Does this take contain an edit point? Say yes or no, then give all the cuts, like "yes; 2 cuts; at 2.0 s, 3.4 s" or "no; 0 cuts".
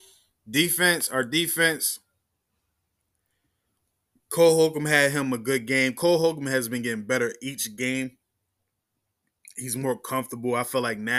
no; 0 cuts